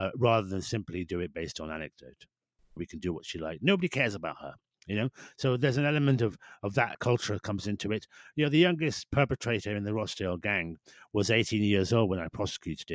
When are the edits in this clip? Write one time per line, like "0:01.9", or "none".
0:02.8
0:06.9